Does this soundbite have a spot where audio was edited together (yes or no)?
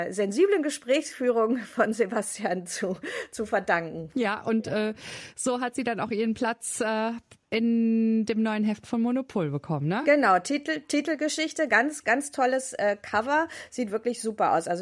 no